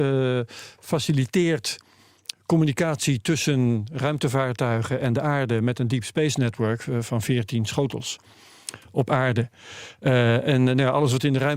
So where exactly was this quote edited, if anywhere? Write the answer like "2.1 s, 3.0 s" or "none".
none